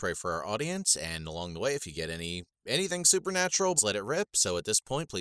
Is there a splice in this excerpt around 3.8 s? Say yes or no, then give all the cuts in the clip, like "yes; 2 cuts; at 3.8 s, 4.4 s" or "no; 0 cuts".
yes; 2 cuts; at 2.5 s, 3.8 s